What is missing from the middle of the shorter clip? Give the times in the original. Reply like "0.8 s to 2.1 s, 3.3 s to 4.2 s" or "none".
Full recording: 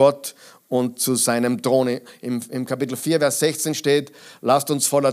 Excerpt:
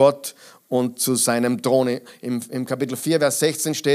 none